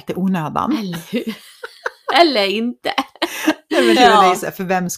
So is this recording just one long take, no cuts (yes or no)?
no